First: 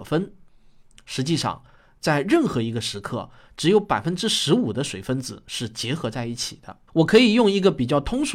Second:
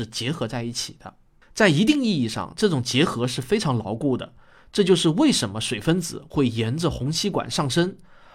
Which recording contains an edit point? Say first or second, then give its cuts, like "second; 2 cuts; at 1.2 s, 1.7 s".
first; 1 cut; at 6.9 s